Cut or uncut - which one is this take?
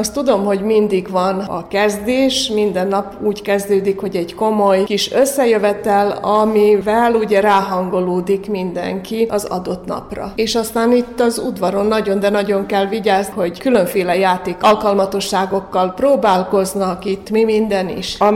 cut